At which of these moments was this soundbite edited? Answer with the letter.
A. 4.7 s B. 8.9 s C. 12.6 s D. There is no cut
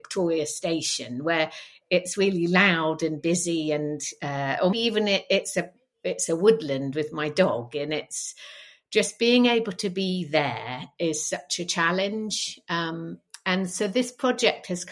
A